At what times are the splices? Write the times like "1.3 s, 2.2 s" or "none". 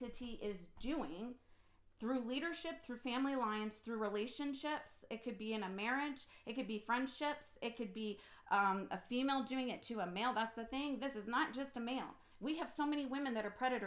none